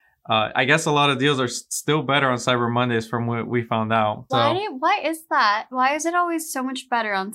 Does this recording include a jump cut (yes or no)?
yes